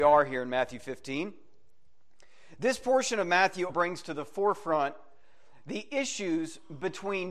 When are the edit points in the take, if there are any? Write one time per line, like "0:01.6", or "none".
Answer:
0:03.7